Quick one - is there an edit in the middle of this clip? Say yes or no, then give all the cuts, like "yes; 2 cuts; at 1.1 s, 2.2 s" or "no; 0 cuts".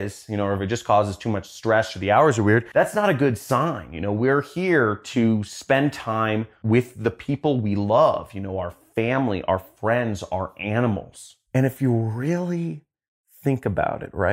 no; 0 cuts